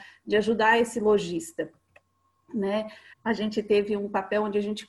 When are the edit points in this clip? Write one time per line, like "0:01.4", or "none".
0:03.1